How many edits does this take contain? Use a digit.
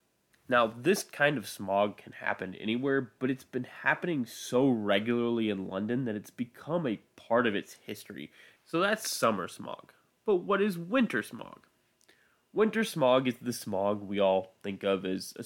1